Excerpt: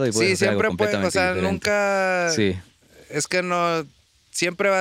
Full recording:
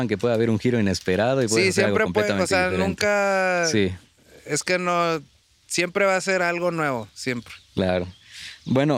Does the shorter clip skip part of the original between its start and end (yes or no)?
no